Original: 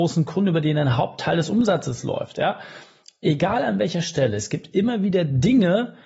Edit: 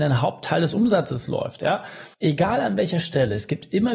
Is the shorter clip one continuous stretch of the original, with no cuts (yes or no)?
no